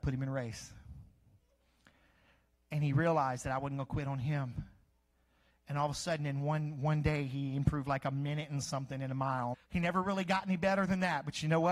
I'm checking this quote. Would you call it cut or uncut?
cut